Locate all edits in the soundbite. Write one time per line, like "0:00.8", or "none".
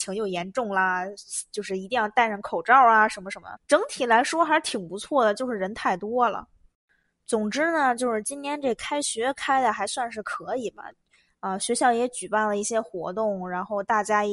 0:03.6

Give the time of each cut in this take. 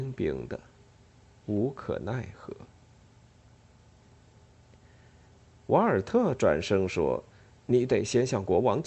0:05.6

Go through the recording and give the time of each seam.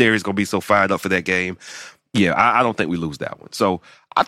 none

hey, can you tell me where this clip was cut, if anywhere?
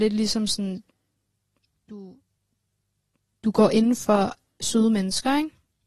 none

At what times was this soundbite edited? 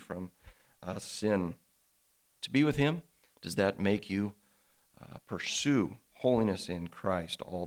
0:02.3

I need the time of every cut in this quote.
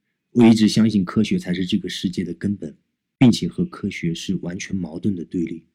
0:03.1

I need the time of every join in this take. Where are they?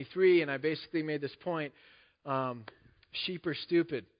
none

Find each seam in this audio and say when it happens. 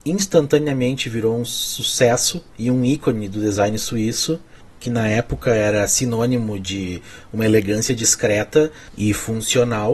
0:02.5

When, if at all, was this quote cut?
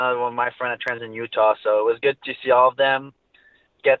none

